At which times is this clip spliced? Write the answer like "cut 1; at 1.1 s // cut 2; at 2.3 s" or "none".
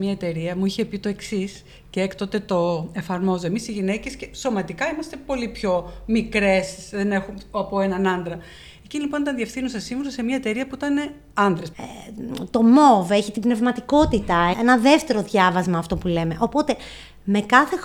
cut 1; at 11.7 s // cut 2; at 14.5 s